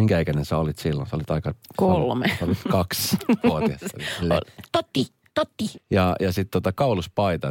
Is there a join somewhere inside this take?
yes; 1 cut; at 5.7 s

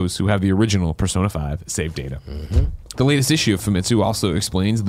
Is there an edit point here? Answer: yes; 1 cut; at 2.9 s

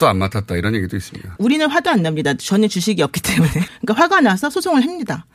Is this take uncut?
no; 2 cuts; at 1.4 s, 3.7 s

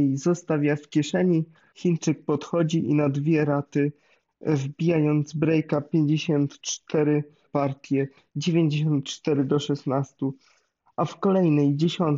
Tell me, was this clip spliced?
yes; 2 cuts; at 1.7 s, 7.5 s

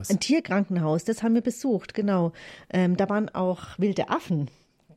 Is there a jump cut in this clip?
no; 0 cuts

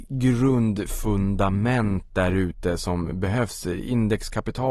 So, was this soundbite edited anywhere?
no; 0 cuts

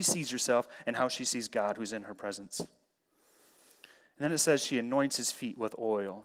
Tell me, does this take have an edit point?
no; 0 cuts

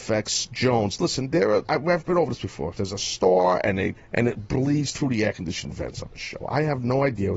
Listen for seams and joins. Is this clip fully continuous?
no; 3 cuts; at 1.6 s, 2.8 s, 4.0 s

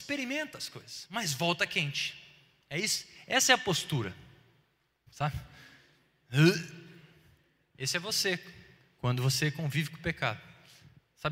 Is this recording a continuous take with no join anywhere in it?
no; 1 cut; at 5.1 s

